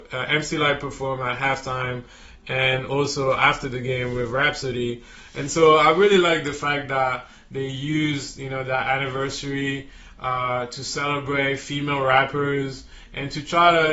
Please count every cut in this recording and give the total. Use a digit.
0